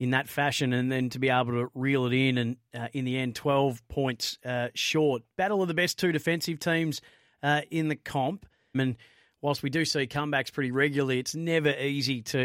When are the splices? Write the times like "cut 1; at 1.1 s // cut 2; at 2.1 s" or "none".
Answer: cut 1; at 8.7 s